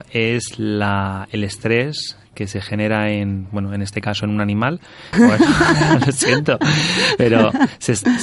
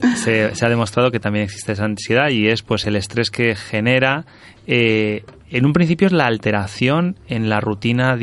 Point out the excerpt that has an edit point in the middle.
first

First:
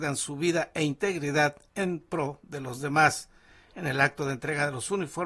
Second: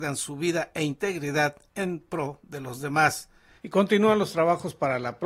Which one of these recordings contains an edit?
second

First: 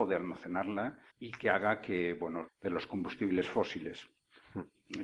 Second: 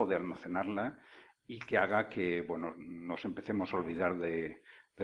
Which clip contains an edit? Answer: first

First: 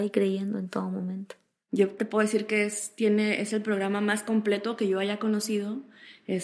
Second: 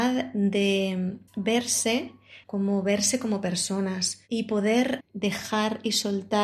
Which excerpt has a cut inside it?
second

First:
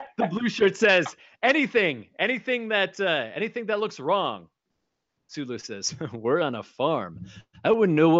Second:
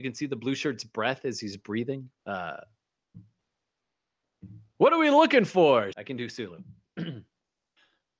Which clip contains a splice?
second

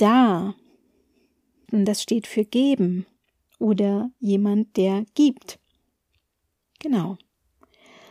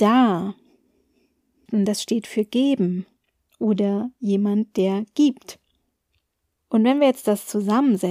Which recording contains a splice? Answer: second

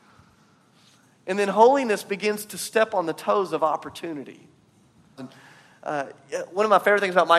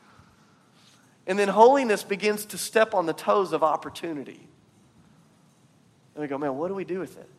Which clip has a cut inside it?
first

